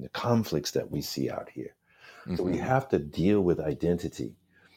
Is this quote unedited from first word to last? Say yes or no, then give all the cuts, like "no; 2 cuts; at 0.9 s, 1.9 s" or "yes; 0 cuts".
yes; 0 cuts